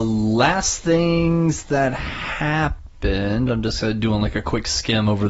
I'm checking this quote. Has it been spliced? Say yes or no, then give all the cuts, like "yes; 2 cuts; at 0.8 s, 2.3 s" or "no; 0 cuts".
no; 0 cuts